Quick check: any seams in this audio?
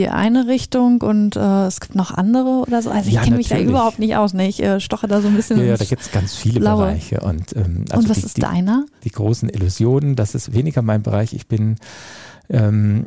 no; 0 cuts

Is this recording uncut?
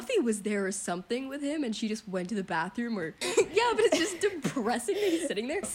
no; 1 cut; at 3.2 s

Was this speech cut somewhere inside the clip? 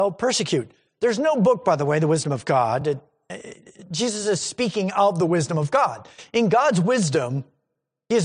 no; 0 cuts

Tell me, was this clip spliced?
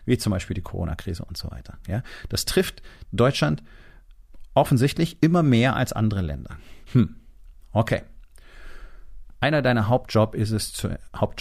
yes; 2 cuts; at 6.9 s, 9.3 s

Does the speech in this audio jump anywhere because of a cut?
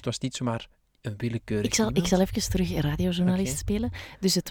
no; 0 cuts

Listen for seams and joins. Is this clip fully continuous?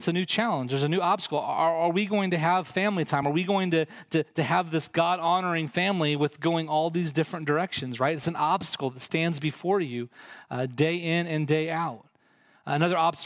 yes; 0 cuts

